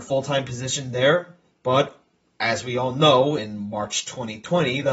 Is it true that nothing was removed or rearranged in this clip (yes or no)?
yes